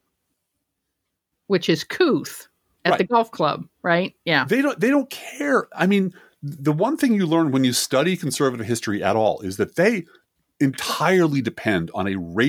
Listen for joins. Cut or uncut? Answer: uncut